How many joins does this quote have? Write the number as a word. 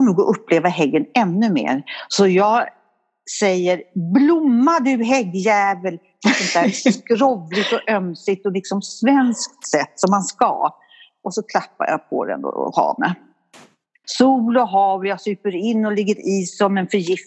one